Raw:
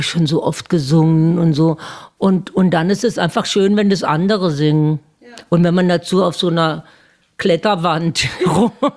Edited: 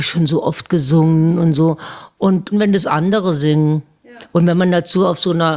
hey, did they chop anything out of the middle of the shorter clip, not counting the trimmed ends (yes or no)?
yes